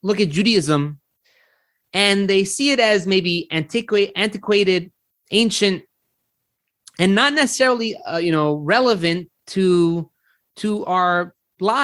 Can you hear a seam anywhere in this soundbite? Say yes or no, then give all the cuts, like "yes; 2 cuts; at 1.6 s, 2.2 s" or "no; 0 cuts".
no; 0 cuts